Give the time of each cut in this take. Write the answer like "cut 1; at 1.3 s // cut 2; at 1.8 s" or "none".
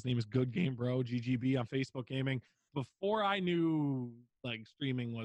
cut 1; at 2.7 s